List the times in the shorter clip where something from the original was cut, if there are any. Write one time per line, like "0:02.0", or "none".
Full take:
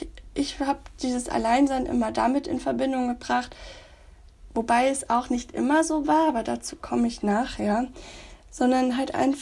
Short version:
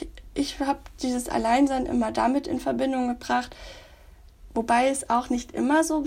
none